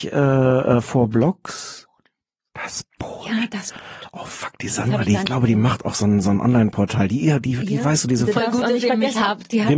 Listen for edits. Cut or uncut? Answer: uncut